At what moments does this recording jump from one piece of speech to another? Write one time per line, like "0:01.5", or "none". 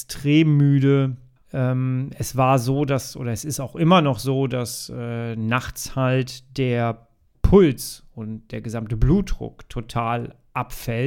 0:01.4